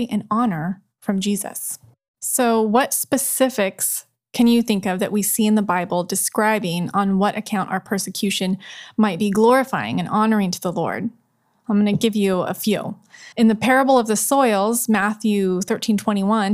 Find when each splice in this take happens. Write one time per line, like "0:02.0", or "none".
0:13.3

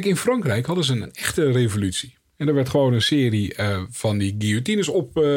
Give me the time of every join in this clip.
none

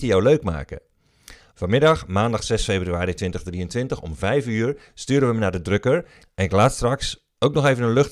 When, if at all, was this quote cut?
0:01.5
0:06.2

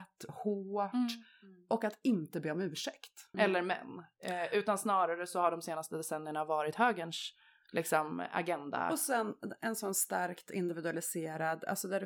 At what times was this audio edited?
0:03.3

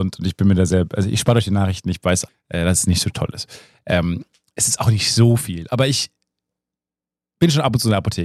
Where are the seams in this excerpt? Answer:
0:02.3

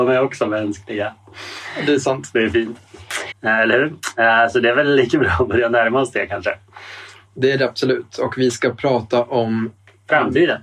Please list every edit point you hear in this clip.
0:03.3

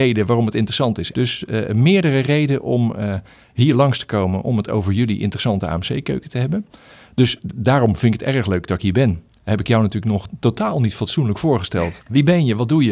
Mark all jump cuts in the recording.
0:01.1
0:12.0

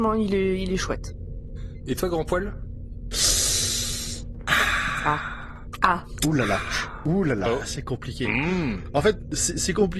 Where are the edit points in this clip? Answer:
none

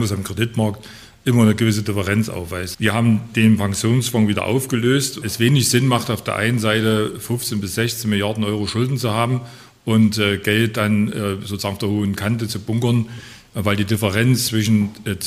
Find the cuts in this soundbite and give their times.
0:02.7
0:05.2

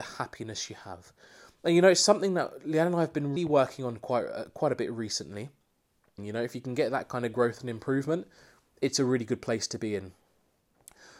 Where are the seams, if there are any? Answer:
0:03.4
0:06.2

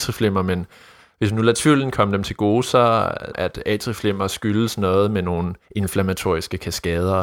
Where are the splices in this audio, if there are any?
0:03.3
0:05.6

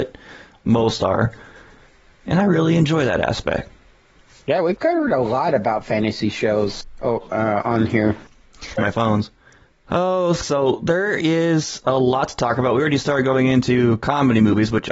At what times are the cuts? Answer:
0:08.8
0:10.4

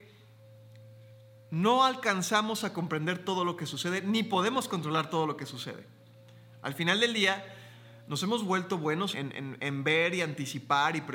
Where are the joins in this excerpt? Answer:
0:09.1

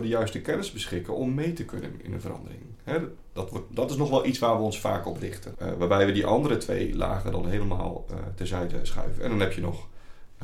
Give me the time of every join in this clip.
0:05.5

